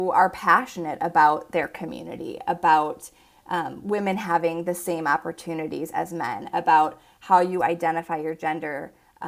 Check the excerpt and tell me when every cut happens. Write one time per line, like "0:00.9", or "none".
none